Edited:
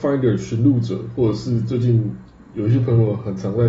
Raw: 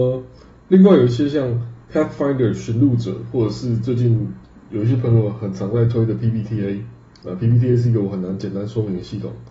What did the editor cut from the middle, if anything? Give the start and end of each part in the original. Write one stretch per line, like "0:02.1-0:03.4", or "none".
none